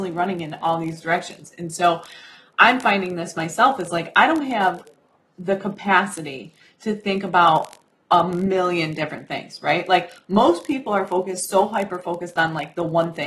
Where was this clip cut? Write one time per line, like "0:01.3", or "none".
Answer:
none